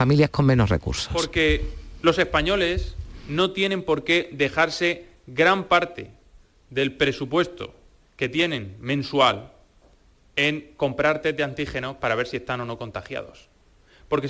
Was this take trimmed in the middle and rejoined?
no; 0 cuts

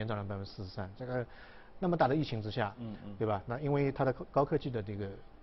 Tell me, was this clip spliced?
no; 0 cuts

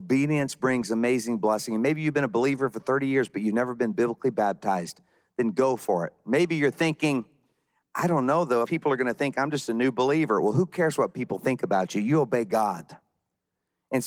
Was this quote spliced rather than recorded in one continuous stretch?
yes; 1 cut; at 8.6 s

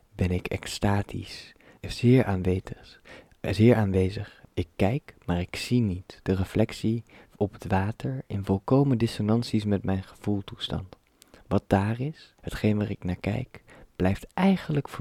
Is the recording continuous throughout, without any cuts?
no; 3 cuts; at 1.8 s, 4.4 s, 12.4 s

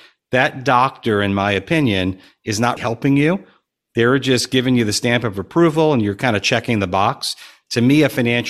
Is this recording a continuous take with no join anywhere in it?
no; 1 cut; at 2.8 s

